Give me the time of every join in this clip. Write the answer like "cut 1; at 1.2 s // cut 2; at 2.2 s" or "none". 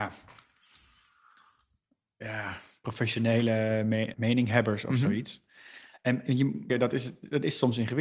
cut 1; at 4.1 s // cut 2; at 6.7 s